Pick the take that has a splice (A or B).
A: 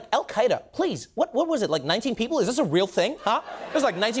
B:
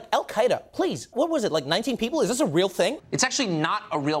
B